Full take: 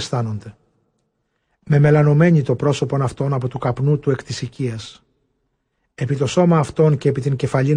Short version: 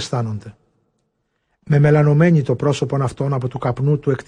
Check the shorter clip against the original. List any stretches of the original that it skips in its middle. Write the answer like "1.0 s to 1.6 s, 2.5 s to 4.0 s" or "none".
none